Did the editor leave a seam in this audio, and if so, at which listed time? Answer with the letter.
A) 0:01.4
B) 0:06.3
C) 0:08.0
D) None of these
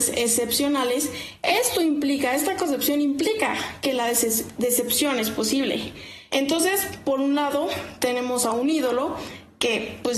B